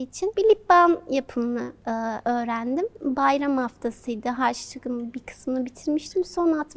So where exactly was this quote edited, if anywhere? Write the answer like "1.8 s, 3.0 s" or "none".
none